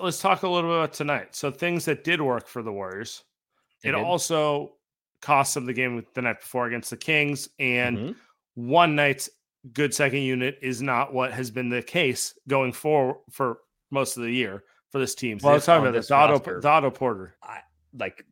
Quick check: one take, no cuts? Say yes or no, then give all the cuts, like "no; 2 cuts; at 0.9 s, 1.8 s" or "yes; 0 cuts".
no; 3 cuts; at 3.8 s, 15.4 s, 17.4 s